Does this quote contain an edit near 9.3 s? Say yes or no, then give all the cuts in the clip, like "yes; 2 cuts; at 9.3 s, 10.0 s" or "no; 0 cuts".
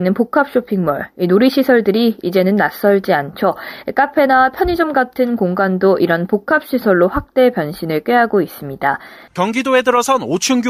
yes; 1 cut; at 9.3 s